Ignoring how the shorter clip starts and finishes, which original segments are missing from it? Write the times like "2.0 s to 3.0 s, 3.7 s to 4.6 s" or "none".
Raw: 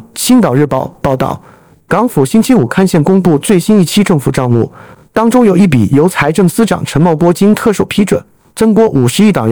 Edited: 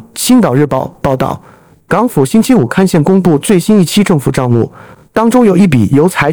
none